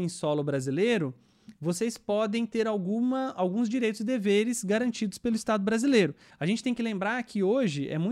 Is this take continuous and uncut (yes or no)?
no